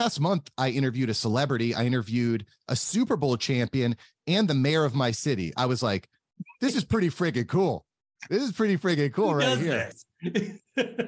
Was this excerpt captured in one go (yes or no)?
yes